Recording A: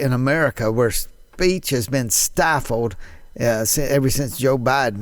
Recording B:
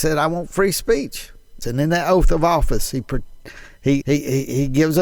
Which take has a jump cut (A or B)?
B